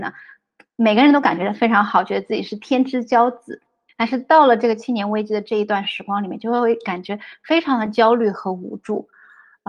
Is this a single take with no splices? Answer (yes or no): yes